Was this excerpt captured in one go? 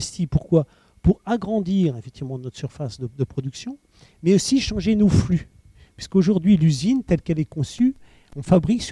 yes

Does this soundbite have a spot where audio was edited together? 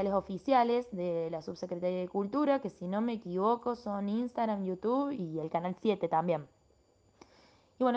no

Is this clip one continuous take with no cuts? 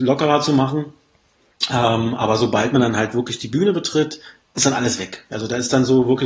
yes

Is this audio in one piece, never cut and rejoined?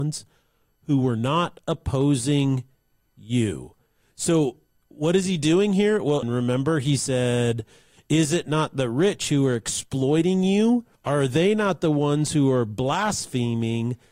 no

